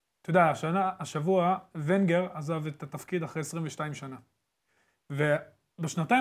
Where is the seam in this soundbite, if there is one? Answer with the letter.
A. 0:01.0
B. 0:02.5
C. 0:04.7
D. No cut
D